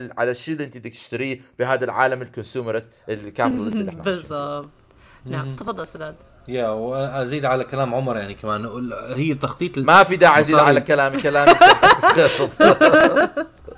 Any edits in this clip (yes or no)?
no